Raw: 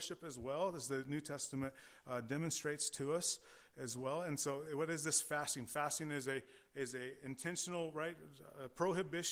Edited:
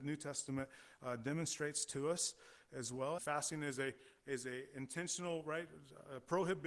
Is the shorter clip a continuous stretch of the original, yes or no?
no